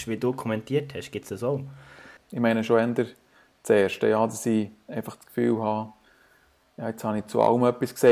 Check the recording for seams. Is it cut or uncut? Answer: cut